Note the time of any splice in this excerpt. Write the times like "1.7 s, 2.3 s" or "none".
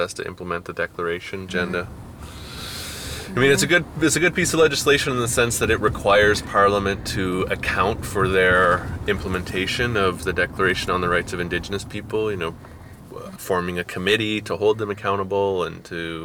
1.5 s, 13.4 s

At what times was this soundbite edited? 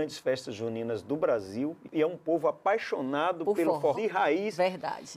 1.9 s, 3.9 s

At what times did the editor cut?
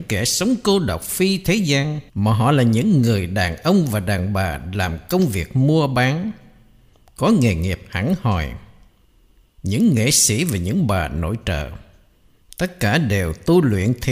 2.1 s

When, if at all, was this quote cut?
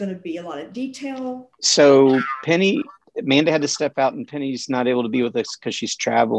1.5 s

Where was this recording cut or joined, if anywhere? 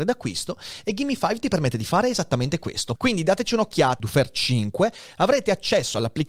3.0 s, 4.0 s

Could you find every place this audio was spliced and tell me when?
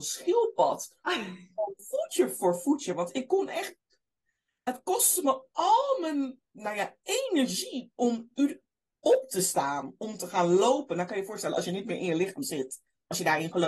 none

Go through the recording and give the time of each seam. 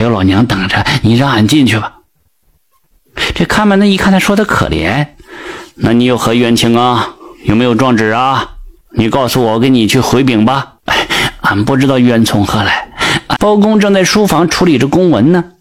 10.8 s, 13.4 s

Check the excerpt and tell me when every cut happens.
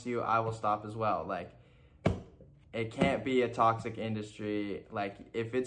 none

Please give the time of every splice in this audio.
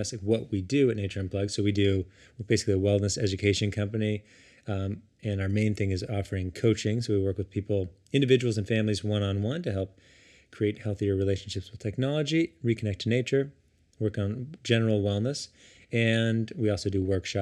none

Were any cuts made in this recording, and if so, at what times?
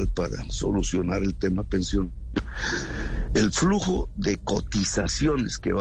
3.3 s

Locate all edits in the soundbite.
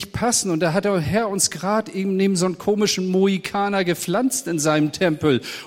none

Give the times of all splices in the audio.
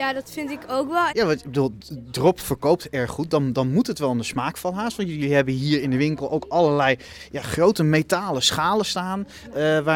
1.1 s

